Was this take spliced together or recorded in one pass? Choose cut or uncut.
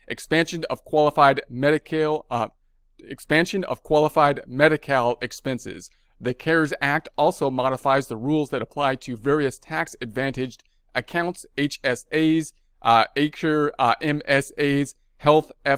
uncut